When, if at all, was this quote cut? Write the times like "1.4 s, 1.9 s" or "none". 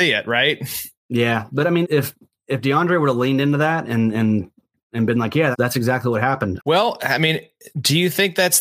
1.8 s, 5.5 s, 6.6 s